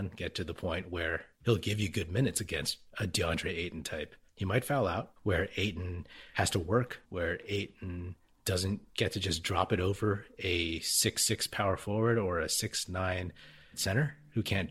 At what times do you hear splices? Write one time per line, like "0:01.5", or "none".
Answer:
0:05.2
0:07.0